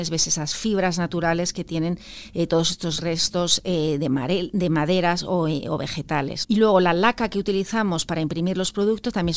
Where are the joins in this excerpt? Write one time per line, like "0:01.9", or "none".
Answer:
0:06.4